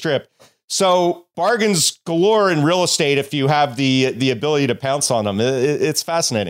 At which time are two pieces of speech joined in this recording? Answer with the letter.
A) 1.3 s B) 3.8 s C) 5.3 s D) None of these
A